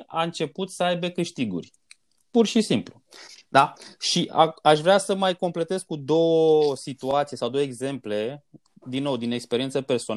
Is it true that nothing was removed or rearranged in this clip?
yes; 0 cuts

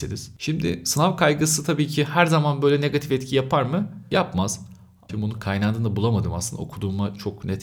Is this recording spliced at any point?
yes; 1 cut; at 5.1 s

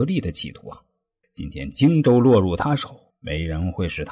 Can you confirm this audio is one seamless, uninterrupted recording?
no; 2 cuts; at 1.2 s, 3.1 s

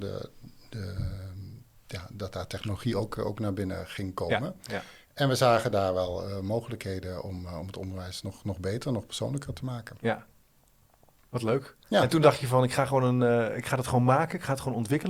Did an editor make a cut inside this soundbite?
no; 0 cuts

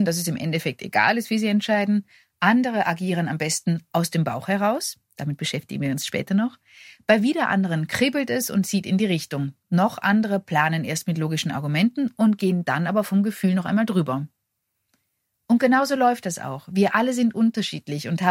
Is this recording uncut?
yes; 0 cuts

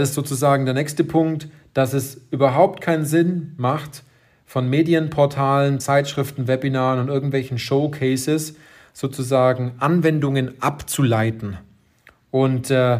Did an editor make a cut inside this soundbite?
no; 0 cuts

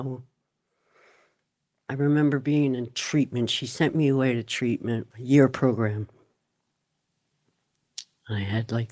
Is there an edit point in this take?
yes; 1 cut; at 5.1 s

